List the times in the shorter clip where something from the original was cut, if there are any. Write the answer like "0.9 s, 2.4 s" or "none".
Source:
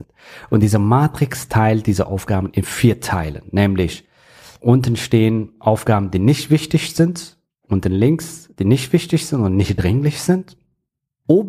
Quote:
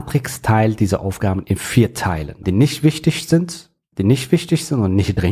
2.4 s, 3.9 s